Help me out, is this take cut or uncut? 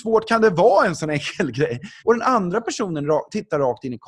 cut